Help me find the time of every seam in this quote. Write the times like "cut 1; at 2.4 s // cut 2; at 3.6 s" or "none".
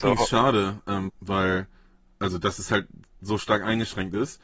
cut 1; at 1.1 s